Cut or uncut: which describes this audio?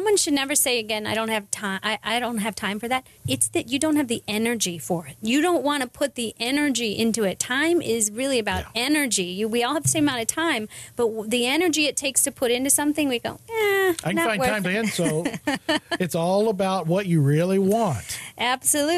cut